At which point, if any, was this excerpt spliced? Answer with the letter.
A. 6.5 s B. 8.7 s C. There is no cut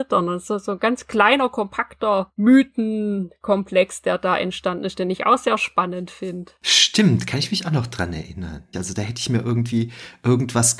B